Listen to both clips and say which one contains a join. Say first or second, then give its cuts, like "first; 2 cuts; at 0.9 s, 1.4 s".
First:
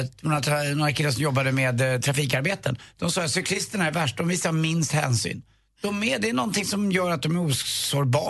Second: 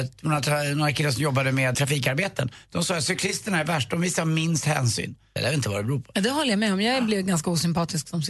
second; 2 cuts; at 1.7 s, 5.4 s